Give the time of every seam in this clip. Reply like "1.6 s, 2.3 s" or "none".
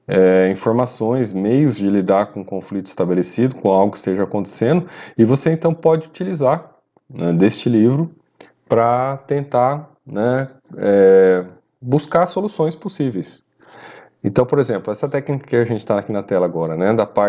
none